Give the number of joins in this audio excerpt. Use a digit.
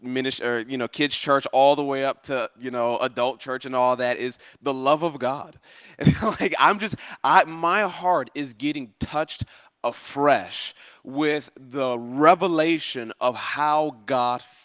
0